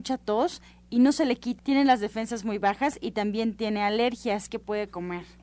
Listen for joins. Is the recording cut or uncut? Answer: cut